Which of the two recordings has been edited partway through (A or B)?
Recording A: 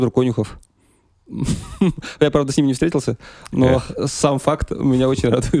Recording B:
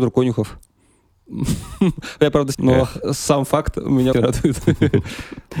B